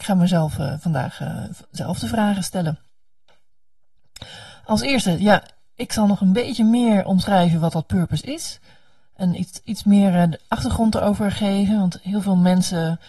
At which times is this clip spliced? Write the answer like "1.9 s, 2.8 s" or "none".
none